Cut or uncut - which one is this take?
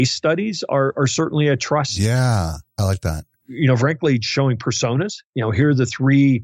uncut